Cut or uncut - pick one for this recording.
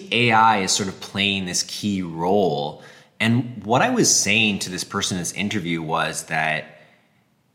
uncut